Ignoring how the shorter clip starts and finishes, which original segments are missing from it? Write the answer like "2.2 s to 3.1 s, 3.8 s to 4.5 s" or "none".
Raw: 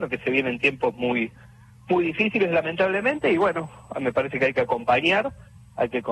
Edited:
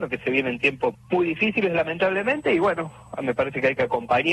0.9 s to 1.7 s

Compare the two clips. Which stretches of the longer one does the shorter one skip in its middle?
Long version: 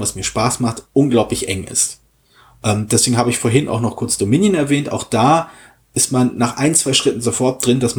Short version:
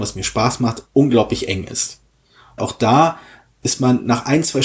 2.6 s to 4.9 s

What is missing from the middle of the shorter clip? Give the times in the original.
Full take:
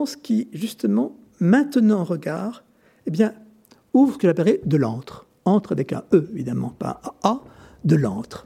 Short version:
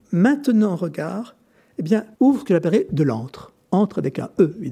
3.4 s to 3.9 s

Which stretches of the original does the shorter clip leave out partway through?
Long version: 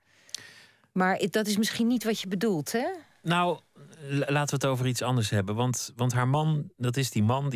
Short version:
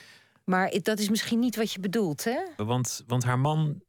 3.1 s to 5.5 s

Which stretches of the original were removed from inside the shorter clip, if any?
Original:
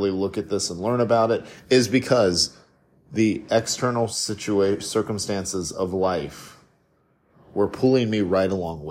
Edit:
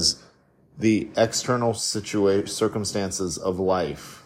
none

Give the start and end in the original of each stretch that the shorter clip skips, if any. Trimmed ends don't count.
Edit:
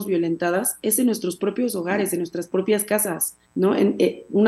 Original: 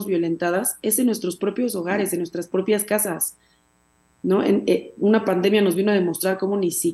3.4 s to 4.1 s

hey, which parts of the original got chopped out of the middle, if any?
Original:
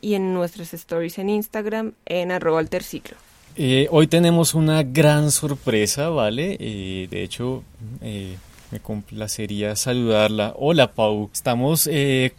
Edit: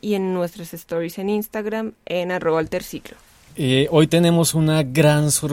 none

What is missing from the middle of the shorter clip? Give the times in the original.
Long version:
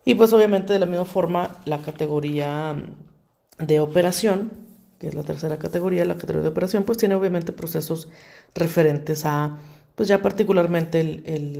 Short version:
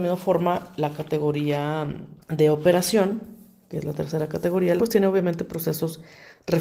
3.1 s to 3.5 s, 6.1 s to 6.8 s

